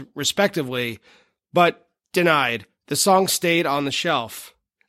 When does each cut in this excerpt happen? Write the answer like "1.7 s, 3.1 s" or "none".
none